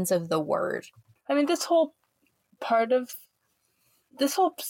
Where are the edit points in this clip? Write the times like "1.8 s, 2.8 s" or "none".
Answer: 1.2 s